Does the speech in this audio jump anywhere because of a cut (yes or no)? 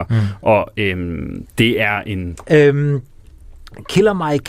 yes